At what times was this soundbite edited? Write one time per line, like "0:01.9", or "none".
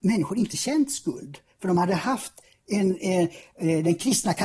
none